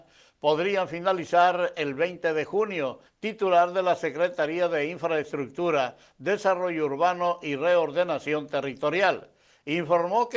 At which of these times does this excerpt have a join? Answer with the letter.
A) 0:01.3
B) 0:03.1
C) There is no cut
B